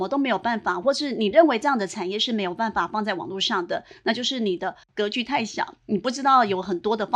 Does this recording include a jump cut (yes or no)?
no